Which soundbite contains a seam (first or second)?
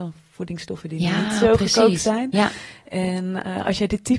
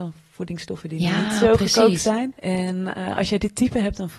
second